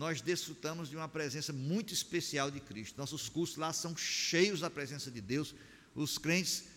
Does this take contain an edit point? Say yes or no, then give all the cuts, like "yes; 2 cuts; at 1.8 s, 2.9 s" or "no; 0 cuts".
no; 0 cuts